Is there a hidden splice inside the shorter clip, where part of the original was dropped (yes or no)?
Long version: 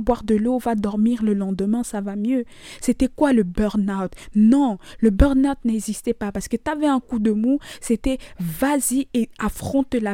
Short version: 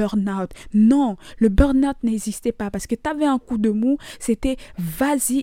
no